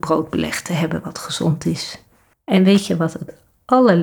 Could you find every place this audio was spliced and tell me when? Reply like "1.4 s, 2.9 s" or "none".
2.3 s